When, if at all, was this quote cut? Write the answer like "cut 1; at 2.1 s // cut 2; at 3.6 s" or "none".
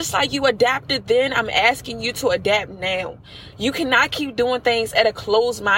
cut 1; at 3.5 s